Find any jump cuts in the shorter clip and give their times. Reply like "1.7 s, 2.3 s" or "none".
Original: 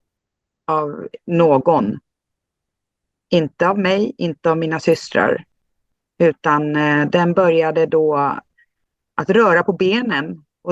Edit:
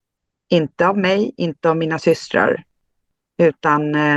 none